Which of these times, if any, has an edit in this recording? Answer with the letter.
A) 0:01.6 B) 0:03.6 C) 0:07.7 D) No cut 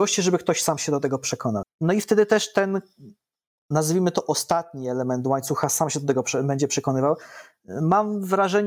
A